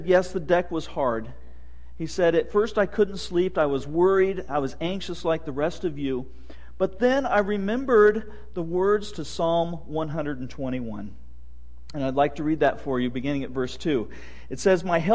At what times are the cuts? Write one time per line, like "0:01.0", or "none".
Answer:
none